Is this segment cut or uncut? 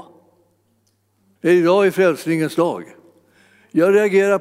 cut